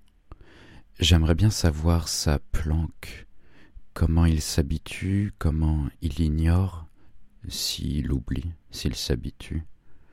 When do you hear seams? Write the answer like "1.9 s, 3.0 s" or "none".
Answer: 7.3 s, 8.6 s